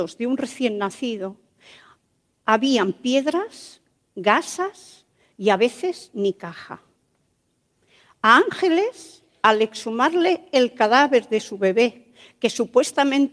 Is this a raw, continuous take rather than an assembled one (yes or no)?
yes